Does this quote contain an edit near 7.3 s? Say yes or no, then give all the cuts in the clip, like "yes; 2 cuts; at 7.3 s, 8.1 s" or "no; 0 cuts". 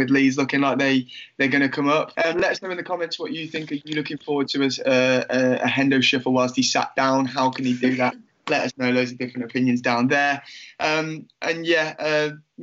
no; 1 cut; at 2.1 s